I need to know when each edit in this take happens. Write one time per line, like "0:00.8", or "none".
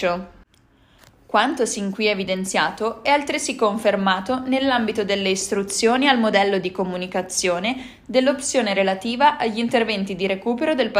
none